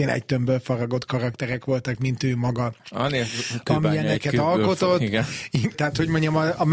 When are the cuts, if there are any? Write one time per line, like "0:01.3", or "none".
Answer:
0:02.8
0:05.7